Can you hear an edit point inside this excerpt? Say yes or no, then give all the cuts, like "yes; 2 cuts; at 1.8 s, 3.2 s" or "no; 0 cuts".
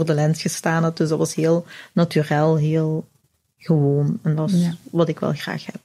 no; 0 cuts